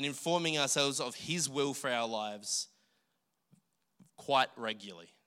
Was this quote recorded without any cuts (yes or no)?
yes